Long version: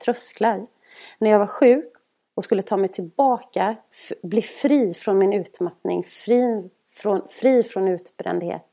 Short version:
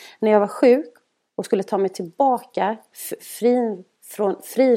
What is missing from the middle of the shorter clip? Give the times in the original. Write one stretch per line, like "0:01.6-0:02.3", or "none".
0:04.2-0:06.0